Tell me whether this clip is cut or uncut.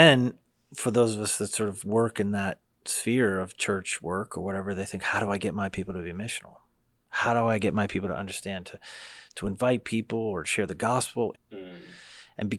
cut